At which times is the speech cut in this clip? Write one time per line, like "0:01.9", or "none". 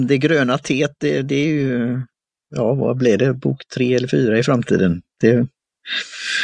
none